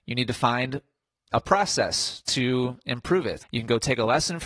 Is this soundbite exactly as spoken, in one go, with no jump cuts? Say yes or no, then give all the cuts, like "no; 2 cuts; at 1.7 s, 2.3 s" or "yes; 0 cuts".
no; 1 cut; at 3.4 s